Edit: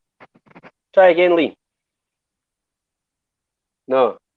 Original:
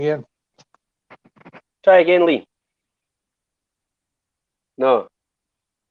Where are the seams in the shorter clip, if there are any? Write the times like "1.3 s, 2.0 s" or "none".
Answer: none